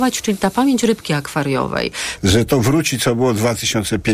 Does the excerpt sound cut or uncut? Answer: cut